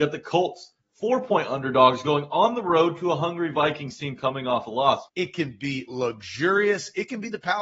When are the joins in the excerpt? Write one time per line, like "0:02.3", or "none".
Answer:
0:05.1

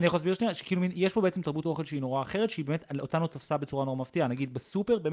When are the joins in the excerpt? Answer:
none

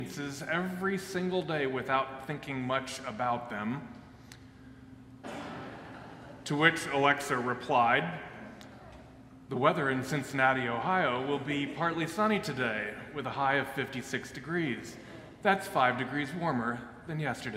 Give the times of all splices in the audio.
0:05.2

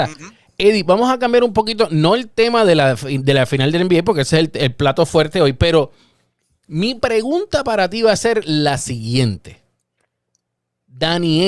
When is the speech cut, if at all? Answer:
none

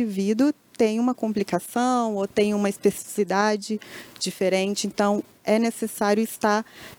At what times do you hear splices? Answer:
none

